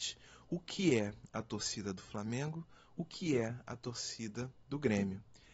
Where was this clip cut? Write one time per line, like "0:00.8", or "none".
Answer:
0:04.6

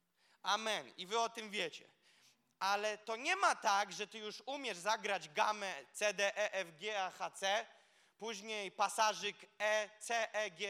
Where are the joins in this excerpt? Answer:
none

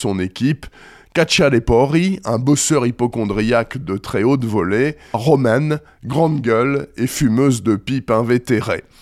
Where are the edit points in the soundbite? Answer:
0:05.1

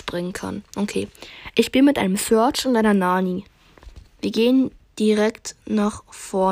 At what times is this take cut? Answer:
none

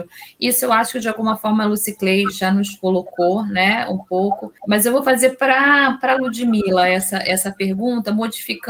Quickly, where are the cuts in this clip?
0:04.6

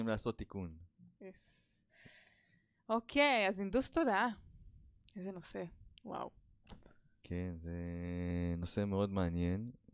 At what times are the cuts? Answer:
none

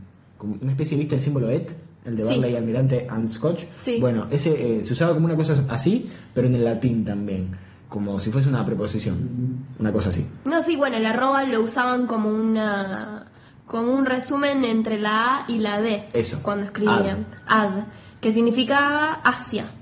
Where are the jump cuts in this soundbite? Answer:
none

